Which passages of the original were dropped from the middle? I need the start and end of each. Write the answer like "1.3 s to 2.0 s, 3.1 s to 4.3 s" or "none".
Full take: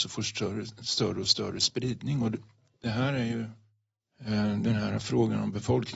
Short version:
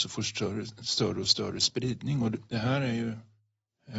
2.5 s to 2.8 s